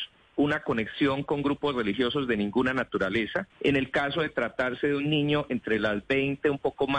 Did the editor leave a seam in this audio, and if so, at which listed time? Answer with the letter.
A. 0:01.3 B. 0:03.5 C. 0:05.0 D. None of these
B